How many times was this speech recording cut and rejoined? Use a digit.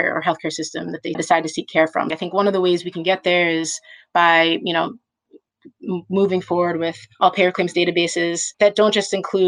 1